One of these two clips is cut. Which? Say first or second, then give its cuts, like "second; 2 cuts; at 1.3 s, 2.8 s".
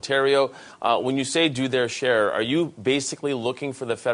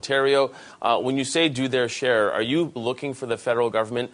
second; 1 cut; at 2.8 s